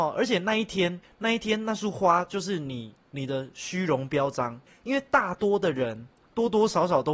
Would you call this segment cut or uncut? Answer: uncut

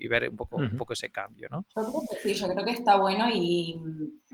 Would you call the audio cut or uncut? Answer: uncut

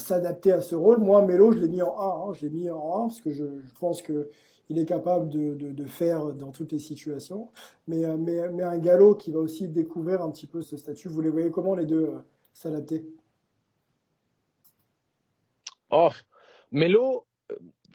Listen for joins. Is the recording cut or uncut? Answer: cut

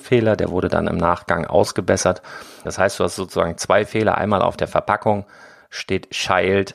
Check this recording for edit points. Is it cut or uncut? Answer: cut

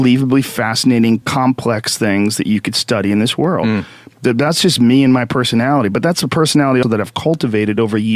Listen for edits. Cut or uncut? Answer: cut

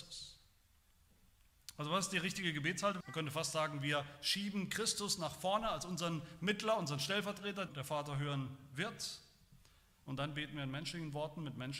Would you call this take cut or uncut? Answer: cut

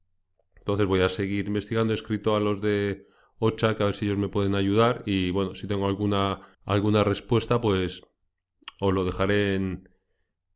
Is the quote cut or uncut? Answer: cut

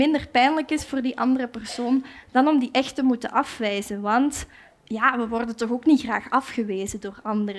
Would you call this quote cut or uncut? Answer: uncut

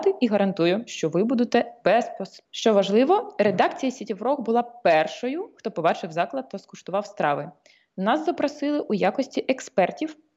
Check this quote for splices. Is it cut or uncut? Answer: cut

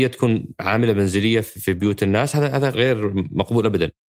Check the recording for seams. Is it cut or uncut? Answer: cut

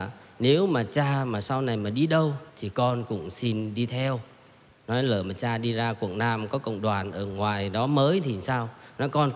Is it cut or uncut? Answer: cut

